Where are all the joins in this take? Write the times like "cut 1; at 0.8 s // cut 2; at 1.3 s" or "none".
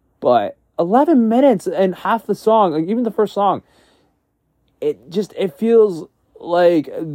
none